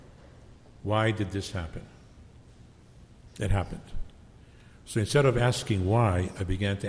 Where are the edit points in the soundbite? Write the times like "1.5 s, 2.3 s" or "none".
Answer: 3.3 s